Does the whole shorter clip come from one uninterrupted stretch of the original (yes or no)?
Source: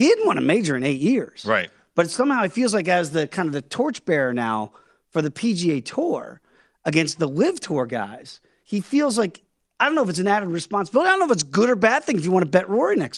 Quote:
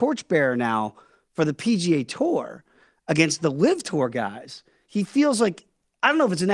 yes